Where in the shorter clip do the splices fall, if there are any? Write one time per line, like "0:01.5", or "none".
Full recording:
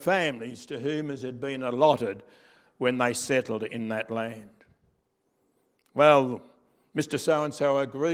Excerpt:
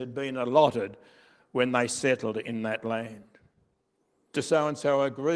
0:04.3